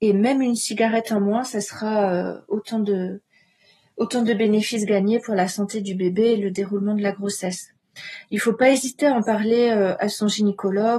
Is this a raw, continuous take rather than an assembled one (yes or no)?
yes